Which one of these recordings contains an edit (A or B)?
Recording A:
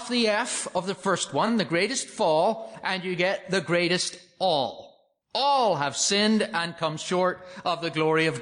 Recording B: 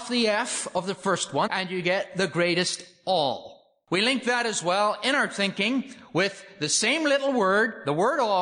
B